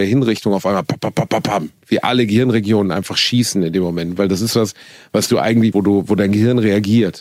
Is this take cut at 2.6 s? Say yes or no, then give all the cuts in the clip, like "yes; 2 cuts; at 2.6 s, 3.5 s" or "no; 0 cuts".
no; 1 cut; at 5.7 s